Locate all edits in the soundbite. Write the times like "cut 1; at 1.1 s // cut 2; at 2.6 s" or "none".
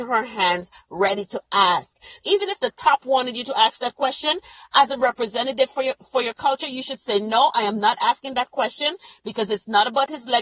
cut 1; at 2.2 s